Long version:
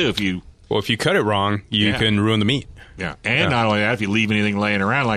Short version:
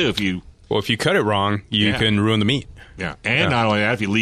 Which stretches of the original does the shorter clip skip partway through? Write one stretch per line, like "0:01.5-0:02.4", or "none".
none